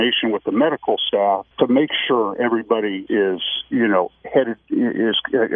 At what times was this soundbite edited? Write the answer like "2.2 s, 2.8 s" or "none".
1.5 s, 3.1 s